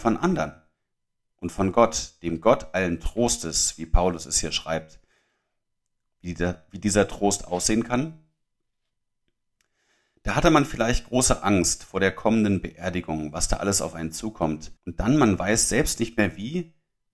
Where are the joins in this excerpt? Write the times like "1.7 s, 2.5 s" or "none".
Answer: 6.1 s, 14.8 s